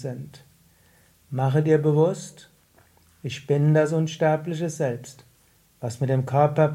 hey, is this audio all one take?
yes; 0 cuts

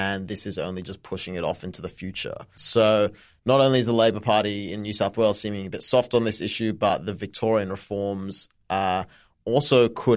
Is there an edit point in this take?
no; 0 cuts

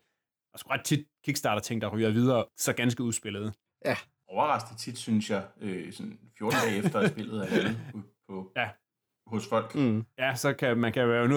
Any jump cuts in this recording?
no; 0 cuts

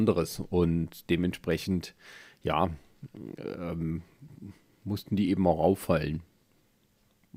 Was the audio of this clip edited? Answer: no; 0 cuts

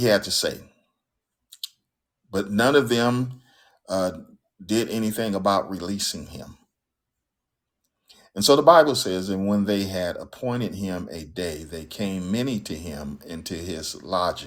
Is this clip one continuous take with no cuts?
yes; 0 cuts

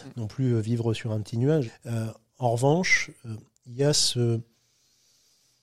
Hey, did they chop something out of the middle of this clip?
yes; 1 cut; at 1.7 s

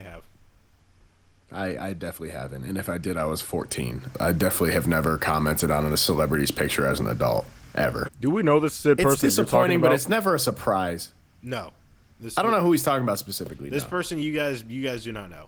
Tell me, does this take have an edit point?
yes; 2 cuts; at 4.1 s, 8.0 s

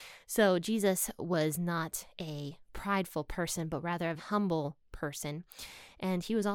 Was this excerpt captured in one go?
no; 1 cut; at 4.2 s

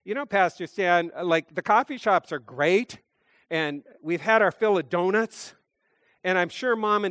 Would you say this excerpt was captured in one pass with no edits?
yes; 0 cuts

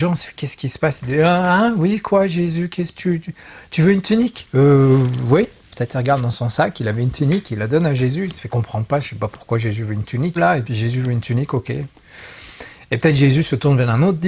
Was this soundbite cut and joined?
yes; 1 cut; at 10.4 s

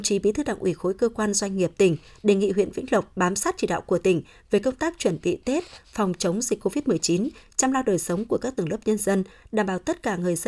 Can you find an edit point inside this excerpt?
no; 0 cuts

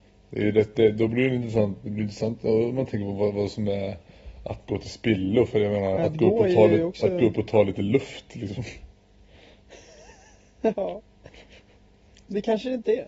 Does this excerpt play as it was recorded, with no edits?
no; 2 cuts; at 6.0 s, 11.3 s

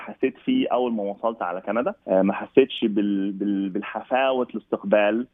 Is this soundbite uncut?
no; 1 cut; at 2.0 s

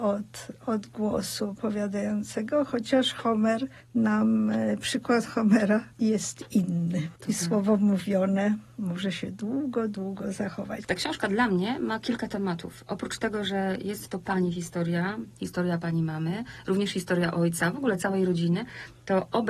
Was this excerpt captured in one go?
no; 1 cut; at 10.8 s

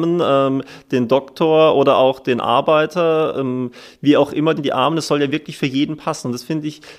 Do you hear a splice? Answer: yes; 1 cut; at 4.6 s

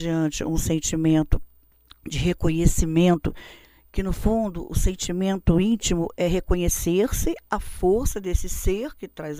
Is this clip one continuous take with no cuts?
yes; 0 cuts

